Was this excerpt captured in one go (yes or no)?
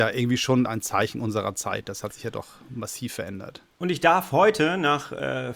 yes